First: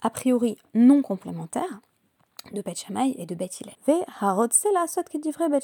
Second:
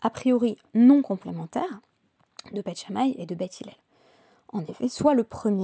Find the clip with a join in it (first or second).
first